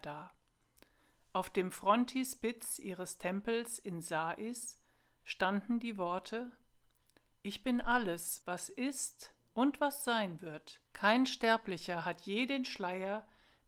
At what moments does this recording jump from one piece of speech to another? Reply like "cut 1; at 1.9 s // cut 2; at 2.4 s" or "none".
cut 1; at 8.4 s // cut 2; at 10.9 s